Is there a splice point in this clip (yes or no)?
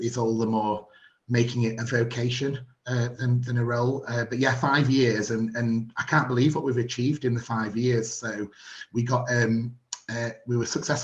no